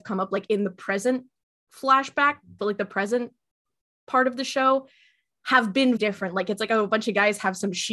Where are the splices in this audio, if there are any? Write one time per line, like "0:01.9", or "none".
0:02.6
0:06.0

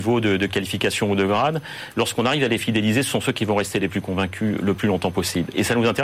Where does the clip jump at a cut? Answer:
none

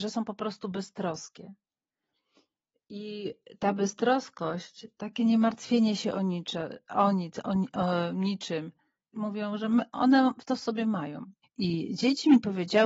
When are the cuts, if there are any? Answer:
0:09.1
0:11.4

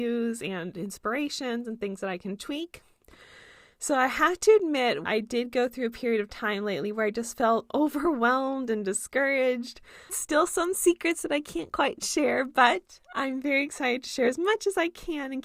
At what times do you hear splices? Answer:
0:05.1
0:10.1

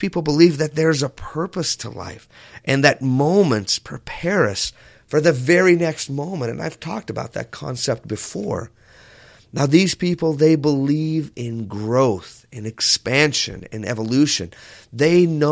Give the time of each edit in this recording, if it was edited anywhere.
none

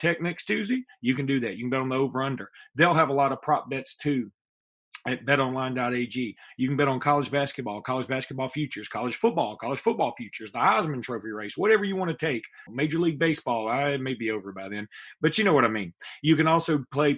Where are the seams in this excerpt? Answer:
0:12.7

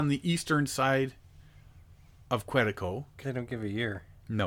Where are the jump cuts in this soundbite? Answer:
0:03.2

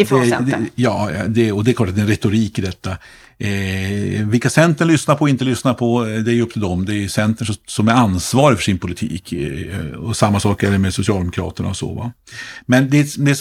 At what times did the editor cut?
none

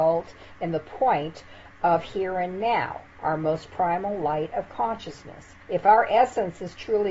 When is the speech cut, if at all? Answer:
0:05.6

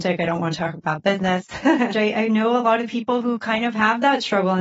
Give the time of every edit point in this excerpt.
0:01.9

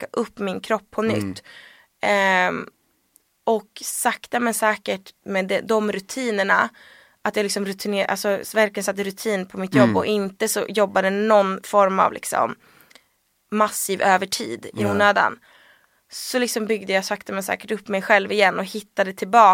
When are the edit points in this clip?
none

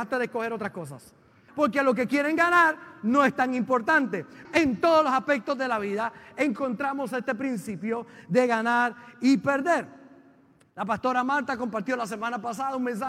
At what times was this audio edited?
0:01.5
0:04.5

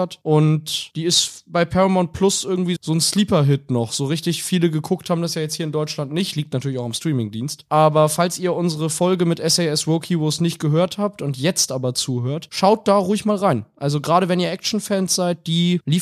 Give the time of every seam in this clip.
none

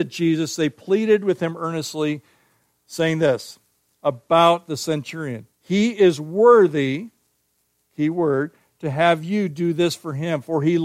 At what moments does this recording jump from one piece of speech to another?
0:05.5

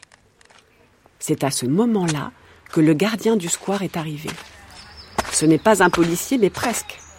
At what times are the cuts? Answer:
none

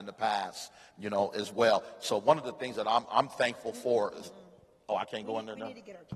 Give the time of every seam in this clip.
0:03.1

